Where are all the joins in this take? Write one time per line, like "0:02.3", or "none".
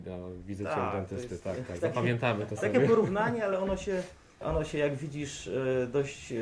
none